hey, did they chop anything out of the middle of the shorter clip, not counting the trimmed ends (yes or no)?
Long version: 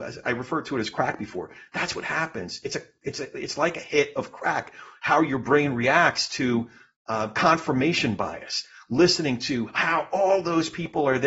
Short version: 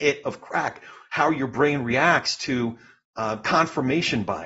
no